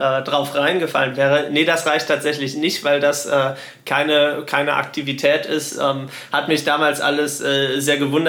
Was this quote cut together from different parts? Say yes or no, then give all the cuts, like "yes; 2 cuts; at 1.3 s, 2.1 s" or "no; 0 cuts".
no; 0 cuts